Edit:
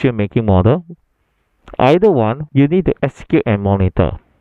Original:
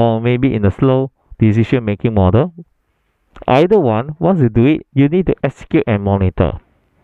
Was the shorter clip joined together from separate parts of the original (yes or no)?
yes